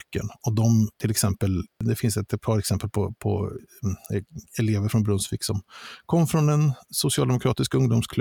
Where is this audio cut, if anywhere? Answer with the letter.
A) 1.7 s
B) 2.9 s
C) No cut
C